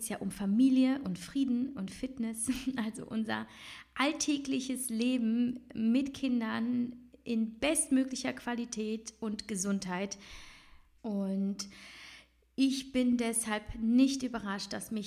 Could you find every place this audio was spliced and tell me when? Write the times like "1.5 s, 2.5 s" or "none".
11.0 s